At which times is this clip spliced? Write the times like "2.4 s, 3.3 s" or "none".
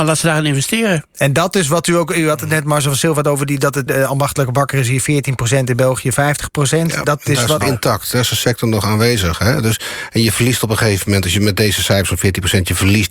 3.9 s, 7.6 s